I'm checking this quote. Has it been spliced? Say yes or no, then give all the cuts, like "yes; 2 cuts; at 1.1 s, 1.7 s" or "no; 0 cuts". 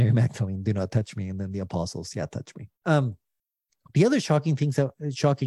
yes; 1 cut; at 2.7 s